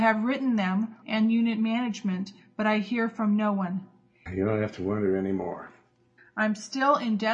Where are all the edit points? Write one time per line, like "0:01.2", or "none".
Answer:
0:01.0
0:04.3
0:06.2